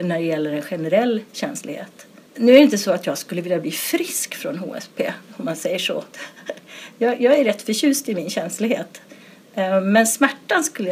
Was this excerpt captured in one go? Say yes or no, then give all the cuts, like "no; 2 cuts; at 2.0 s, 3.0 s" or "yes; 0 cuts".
no; 1 cut; at 2.3 s